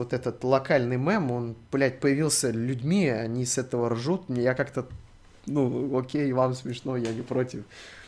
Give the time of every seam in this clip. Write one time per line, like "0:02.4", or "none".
none

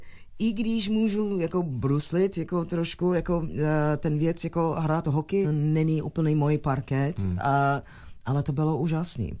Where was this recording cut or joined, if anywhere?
0:05.4

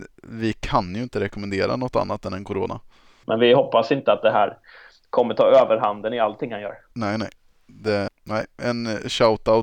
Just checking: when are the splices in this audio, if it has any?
0:03.2
0:08.1

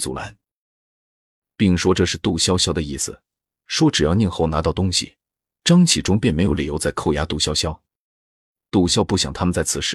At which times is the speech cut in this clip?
0:08.9

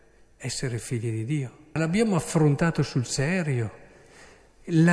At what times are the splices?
0:01.8

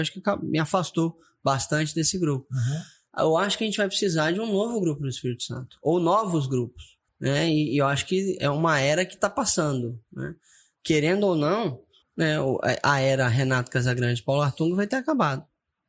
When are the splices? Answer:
0:07.1
0:12.0

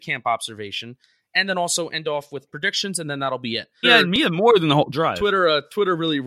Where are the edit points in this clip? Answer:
0:03.8
0:04.9

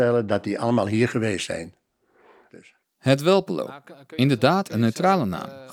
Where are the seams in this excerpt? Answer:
0:02.5

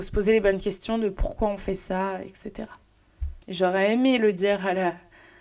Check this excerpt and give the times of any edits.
0:03.4

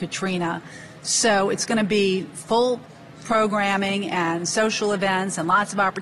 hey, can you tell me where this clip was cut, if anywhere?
0:01.0

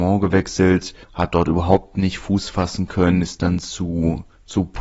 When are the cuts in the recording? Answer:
none

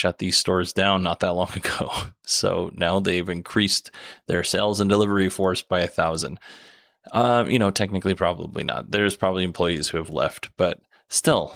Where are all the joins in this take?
none

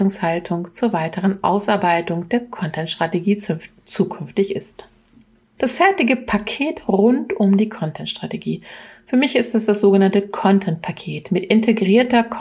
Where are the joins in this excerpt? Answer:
0:05.6

